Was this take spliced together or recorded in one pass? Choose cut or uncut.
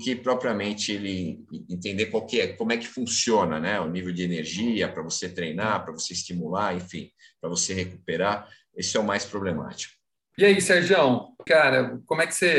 cut